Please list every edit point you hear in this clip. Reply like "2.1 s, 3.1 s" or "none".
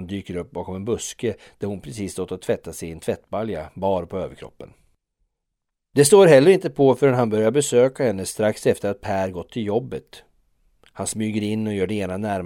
none